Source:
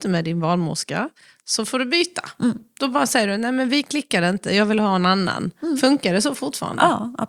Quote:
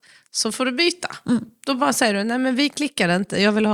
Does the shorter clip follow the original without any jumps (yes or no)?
yes